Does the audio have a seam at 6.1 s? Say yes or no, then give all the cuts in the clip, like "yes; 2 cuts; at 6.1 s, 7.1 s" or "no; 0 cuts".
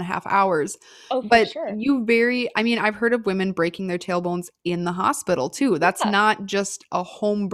no; 0 cuts